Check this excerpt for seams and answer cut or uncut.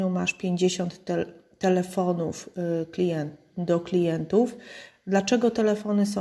uncut